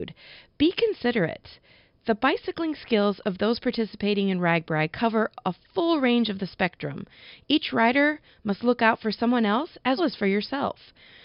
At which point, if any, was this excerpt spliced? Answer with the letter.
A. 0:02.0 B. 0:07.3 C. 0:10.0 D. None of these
C